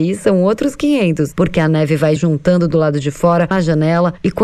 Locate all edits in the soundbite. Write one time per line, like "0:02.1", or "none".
0:02.2
0:03.5